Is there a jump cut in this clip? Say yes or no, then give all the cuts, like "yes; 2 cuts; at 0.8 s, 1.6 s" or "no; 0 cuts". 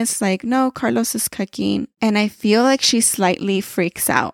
yes; 1 cut; at 1.9 s